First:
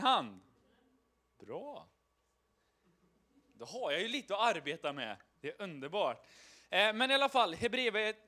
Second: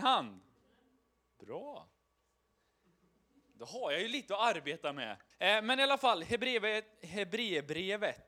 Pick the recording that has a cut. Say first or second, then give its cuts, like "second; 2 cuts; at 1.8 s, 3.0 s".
second; 1 cut; at 5.3 s